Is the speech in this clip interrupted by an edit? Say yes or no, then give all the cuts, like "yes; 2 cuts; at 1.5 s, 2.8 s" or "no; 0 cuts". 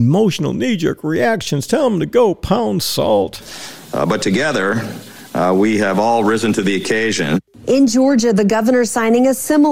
no; 0 cuts